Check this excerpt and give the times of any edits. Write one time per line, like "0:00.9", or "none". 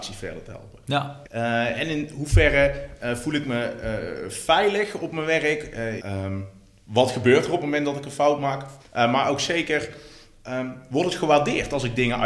0:01.2
0:06.0
0:08.8